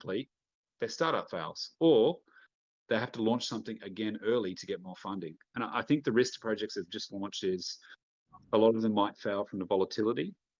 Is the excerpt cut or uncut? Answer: uncut